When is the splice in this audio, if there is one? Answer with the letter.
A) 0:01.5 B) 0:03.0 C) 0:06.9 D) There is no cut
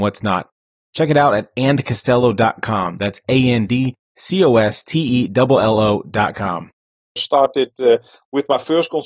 C